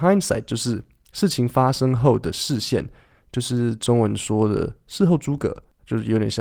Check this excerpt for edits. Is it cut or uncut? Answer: uncut